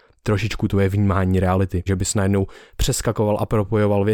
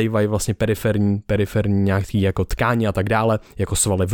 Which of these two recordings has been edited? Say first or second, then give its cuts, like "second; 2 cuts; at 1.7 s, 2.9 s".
first; 1 cut; at 1.9 s